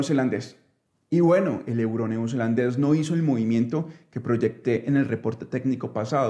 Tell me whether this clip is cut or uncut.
uncut